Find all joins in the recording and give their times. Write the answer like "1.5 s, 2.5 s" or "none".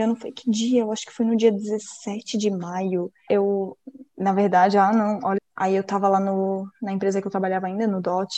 3.3 s, 5.4 s